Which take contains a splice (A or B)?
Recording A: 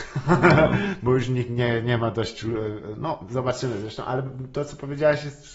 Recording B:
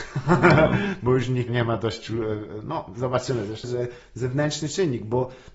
B